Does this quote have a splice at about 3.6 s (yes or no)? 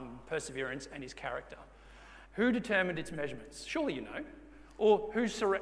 no